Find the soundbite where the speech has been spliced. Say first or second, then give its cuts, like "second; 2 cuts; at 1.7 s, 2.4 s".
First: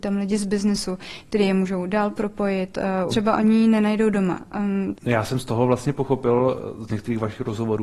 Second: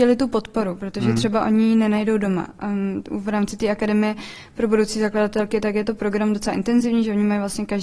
first; 2 cuts; at 3.1 s, 5.0 s